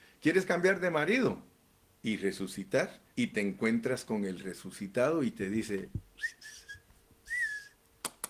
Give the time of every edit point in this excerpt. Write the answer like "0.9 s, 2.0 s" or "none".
2.0 s, 3.1 s